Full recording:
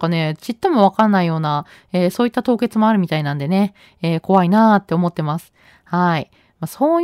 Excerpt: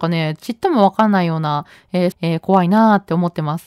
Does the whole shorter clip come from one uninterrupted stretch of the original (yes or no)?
no